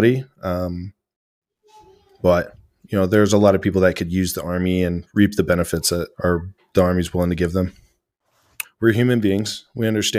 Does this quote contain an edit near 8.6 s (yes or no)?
yes